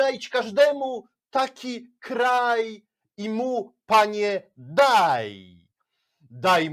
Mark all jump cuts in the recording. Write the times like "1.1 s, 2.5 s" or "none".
none

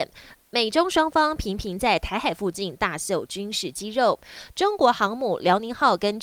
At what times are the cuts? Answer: none

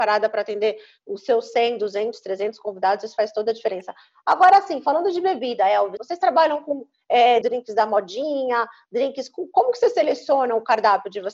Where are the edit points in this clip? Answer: 6.0 s, 7.4 s

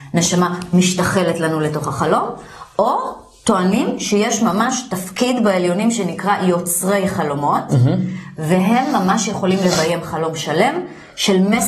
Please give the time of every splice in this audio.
none

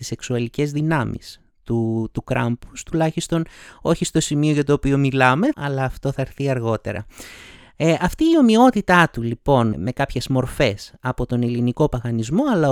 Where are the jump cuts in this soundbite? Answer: 5.5 s, 9.7 s

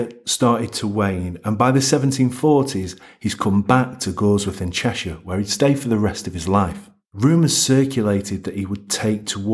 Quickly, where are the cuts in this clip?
7.0 s

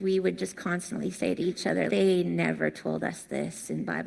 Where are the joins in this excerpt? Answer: 1.9 s

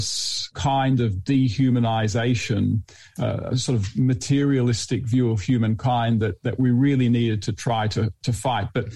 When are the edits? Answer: none

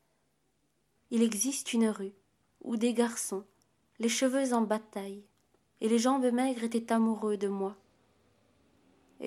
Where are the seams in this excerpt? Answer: 0.9 s, 5.7 s

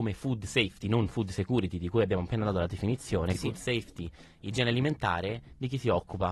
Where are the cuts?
3.3 s

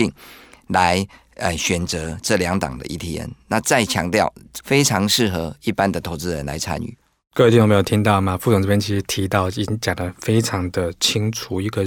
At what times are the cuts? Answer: 4.6 s

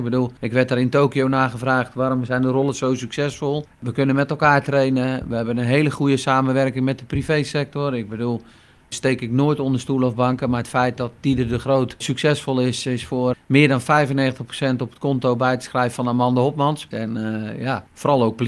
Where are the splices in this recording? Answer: 13.3 s, 16.9 s

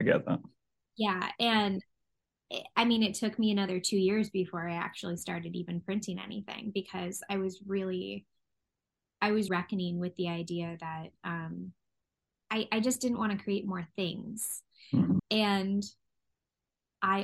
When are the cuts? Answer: 9.5 s, 15.2 s

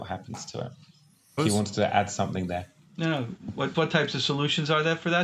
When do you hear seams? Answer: 1.4 s, 3.7 s

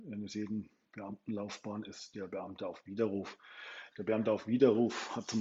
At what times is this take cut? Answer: none

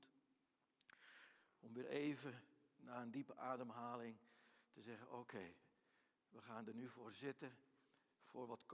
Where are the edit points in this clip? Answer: none

